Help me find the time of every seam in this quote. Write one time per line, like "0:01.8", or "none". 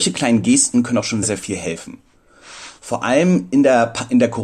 0:01.2